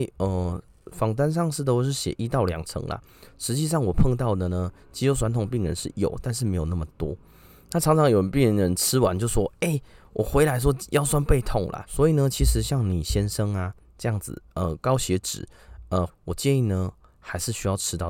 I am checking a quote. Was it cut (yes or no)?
yes